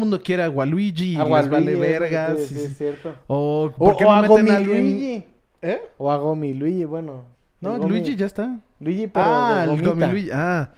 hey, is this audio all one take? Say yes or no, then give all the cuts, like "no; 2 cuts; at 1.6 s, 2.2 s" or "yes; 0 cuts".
yes; 0 cuts